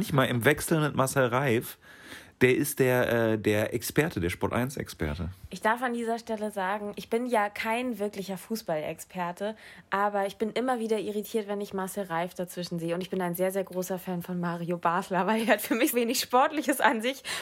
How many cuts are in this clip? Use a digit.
1